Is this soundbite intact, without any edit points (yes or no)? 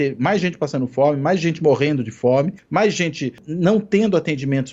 yes